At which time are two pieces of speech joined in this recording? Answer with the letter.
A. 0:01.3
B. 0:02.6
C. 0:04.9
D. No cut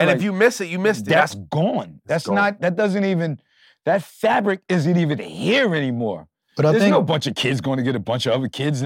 A